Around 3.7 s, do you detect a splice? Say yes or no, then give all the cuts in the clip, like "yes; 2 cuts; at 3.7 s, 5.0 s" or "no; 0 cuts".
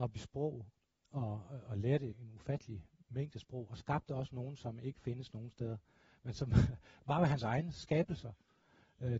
no; 1 cut; at 2.1 s